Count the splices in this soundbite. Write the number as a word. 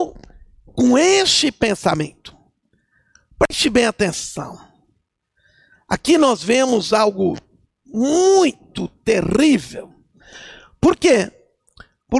zero